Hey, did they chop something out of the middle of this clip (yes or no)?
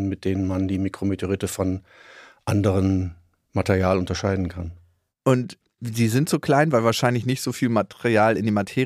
no